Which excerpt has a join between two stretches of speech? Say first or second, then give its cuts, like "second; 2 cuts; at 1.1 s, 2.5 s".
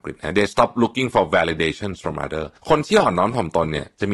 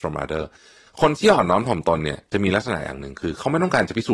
first; 1 cut; at 2.6 s